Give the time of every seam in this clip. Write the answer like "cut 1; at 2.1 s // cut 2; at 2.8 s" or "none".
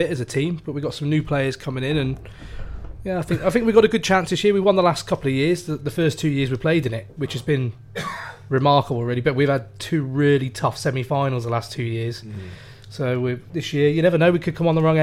none